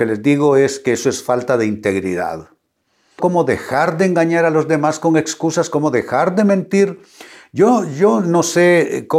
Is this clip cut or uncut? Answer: cut